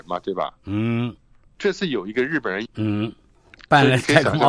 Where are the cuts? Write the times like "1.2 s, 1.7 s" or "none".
2.7 s